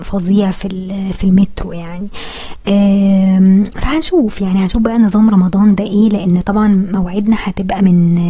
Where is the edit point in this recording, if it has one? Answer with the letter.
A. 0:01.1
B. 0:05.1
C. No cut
C